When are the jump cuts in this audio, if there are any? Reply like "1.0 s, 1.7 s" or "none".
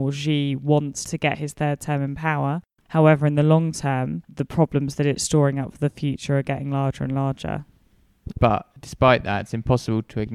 8.3 s